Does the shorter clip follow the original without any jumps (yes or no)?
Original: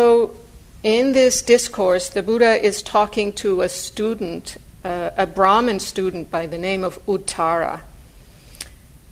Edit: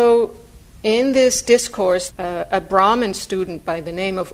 no